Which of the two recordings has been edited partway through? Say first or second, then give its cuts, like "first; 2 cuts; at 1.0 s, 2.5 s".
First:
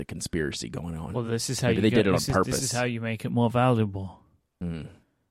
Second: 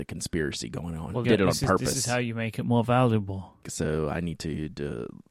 second; 2 cuts; at 1.2 s, 3.6 s